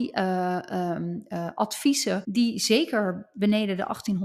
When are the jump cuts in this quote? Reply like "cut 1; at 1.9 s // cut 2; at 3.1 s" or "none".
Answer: cut 1; at 2.2 s

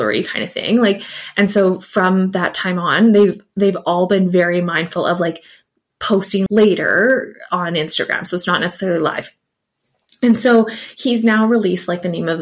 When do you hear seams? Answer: cut 1; at 6.5 s

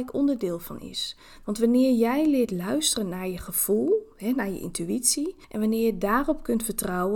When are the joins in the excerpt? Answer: none

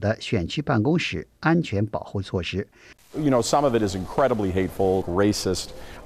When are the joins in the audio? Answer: cut 1; at 2.9 s // cut 2; at 5.0 s

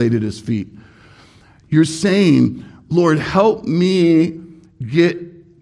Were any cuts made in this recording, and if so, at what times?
none

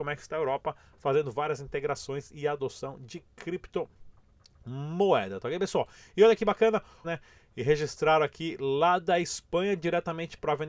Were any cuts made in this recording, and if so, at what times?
cut 1; at 7.0 s

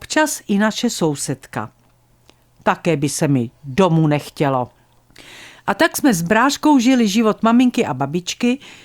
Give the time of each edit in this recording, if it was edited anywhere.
none

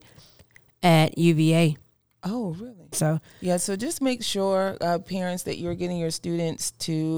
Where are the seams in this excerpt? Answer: cut 1; at 2.9 s

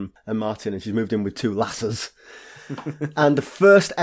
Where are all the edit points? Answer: none

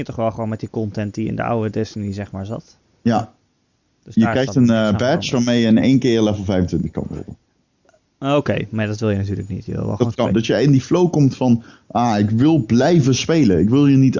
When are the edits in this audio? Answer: cut 1; at 10.3 s

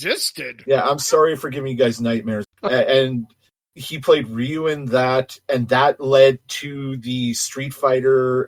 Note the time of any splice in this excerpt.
cut 1; at 2.4 s

